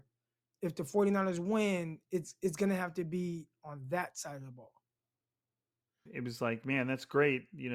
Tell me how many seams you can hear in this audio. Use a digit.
1